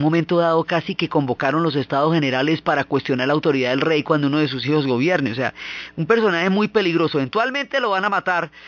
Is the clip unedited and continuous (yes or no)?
yes